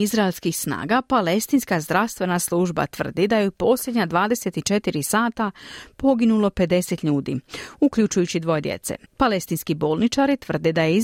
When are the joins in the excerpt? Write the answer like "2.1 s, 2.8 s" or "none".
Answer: 9.1 s